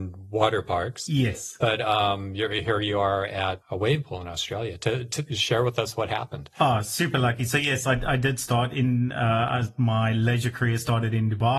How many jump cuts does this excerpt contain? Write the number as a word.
one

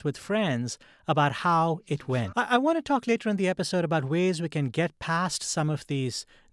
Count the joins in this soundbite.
one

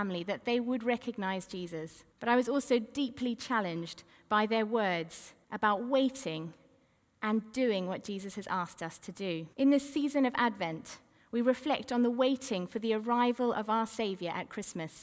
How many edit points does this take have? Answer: three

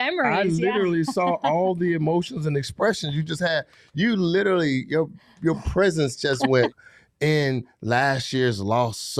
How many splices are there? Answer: one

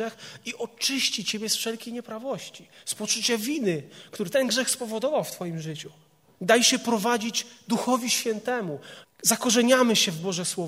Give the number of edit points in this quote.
two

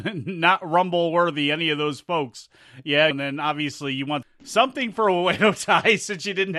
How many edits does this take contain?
two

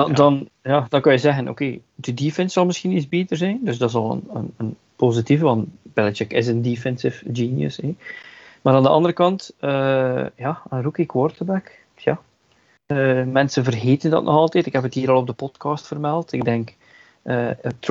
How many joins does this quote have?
zero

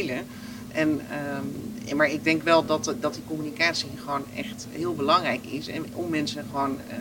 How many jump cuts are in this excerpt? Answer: zero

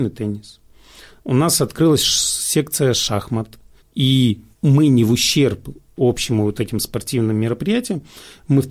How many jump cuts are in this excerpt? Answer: one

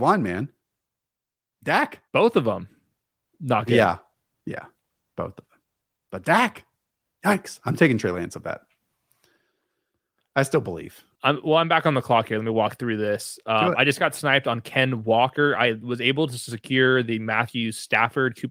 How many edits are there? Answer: two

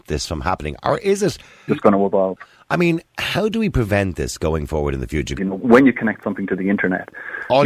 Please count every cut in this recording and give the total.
two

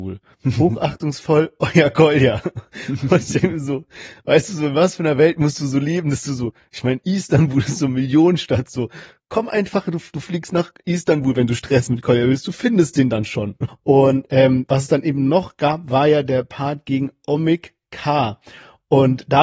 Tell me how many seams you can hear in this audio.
one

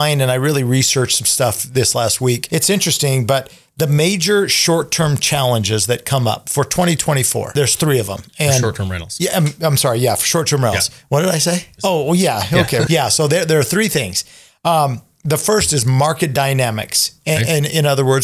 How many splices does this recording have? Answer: one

